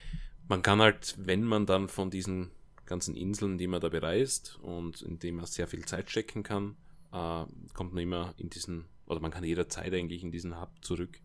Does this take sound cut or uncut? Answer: uncut